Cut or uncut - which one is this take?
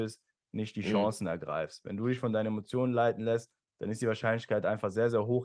uncut